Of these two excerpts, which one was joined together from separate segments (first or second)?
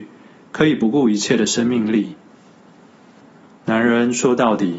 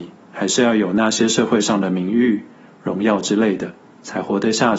first